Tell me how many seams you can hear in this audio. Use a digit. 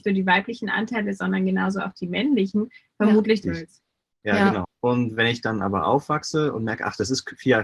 2